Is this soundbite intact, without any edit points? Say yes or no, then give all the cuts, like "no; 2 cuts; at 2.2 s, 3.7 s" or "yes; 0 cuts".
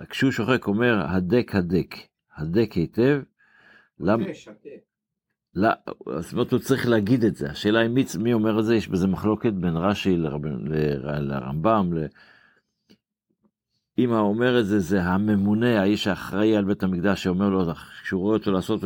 yes; 0 cuts